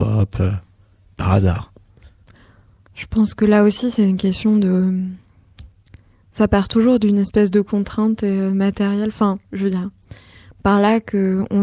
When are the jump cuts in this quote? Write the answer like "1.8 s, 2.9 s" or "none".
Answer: none